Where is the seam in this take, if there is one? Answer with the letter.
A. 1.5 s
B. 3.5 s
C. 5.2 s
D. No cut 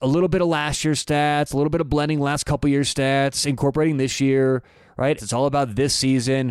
C